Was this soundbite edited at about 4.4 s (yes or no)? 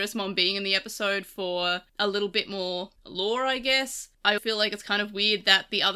yes